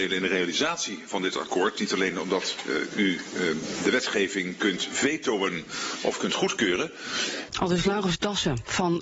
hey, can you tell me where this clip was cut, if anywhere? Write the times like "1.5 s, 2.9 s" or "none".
7.5 s